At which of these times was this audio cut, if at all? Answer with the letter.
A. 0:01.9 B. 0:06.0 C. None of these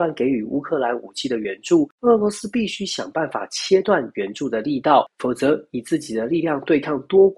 C